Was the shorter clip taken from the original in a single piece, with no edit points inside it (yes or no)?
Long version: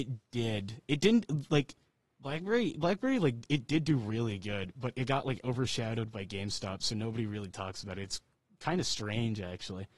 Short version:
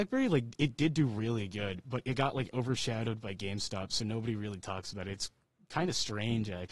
yes